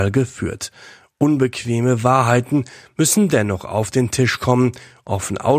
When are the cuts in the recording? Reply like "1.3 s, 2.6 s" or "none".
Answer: none